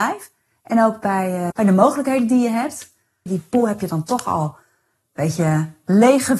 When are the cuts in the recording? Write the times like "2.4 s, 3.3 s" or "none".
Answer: 1.5 s, 3.3 s